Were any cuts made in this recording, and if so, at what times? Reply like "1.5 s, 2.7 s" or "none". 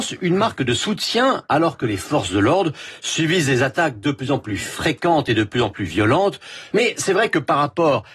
6.7 s